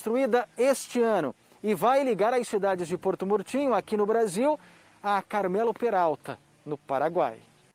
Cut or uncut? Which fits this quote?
uncut